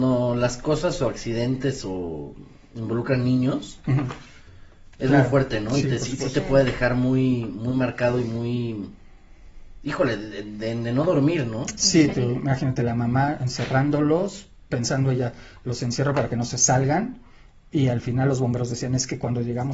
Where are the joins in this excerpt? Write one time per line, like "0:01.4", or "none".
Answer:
0:12.1
0:14.7